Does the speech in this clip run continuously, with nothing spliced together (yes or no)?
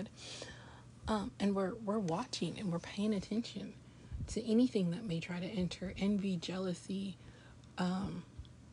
yes